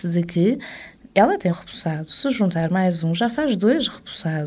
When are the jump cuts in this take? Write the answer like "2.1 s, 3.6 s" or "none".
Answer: 1.5 s